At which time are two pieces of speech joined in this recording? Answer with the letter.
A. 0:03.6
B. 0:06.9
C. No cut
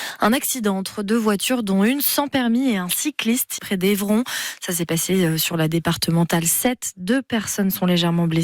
A